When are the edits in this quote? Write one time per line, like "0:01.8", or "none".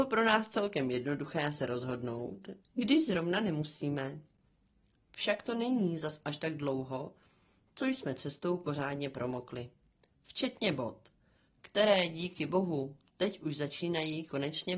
0:02.6